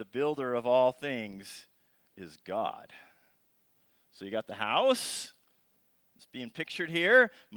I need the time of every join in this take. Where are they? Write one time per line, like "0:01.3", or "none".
none